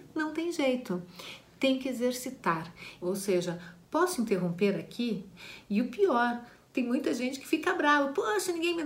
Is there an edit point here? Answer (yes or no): yes